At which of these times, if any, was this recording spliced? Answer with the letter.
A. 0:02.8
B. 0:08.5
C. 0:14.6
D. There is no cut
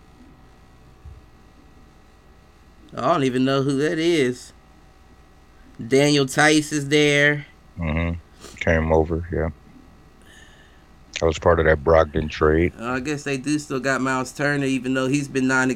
D